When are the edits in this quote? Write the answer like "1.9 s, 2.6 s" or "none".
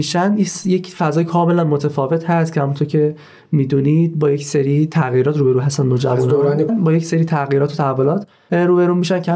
6.7 s